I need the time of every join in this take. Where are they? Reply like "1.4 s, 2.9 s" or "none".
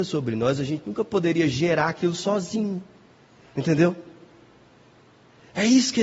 none

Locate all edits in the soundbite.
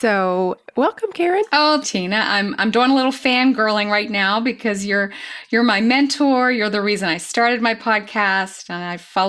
1.8 s

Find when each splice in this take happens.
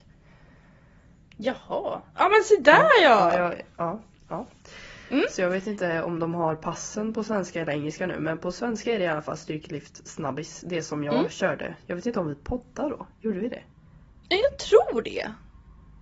none

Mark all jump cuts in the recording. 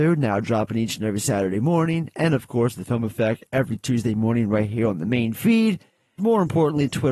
6.2 s

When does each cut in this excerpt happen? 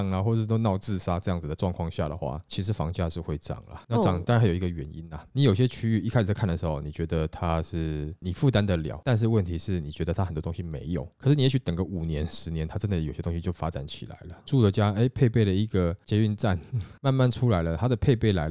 14.4 s, 17.0 s

